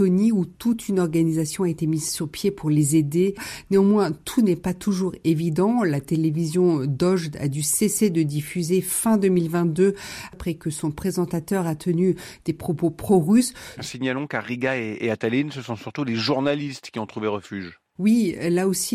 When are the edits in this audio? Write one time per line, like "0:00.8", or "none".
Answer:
0:13.8